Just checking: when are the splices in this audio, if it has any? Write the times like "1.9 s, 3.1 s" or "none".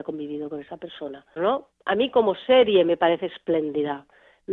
1.4 s